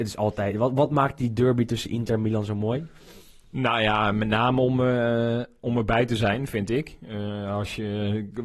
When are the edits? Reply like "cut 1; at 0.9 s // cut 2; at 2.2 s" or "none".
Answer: none